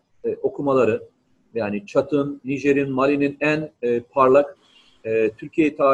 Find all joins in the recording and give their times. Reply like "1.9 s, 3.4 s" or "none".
none

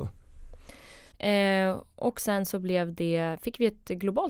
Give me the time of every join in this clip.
1.1 s

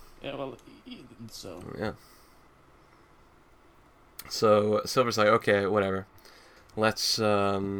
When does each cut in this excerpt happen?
1.3 s

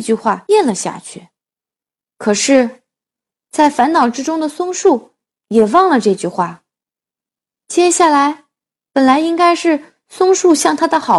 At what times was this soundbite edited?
2.2 s, 7.5 s

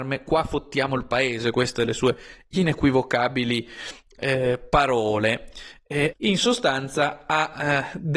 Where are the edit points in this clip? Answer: 6.1 s

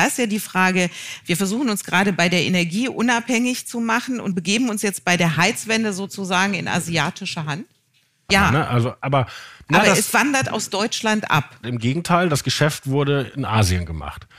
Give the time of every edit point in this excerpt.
8.3 s, 11.6 s

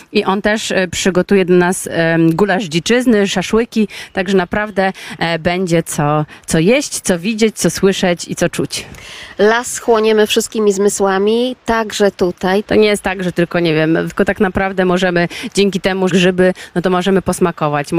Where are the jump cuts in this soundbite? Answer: 12.7 s, 14.1 s, 16.1 s

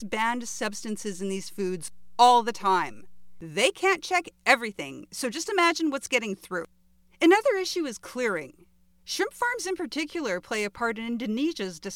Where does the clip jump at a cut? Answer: none

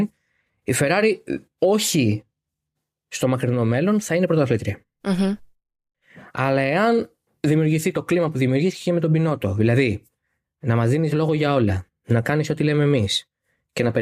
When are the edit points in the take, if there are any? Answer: none

